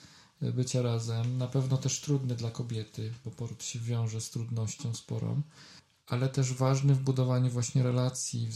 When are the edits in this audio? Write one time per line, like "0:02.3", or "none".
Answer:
0:03.2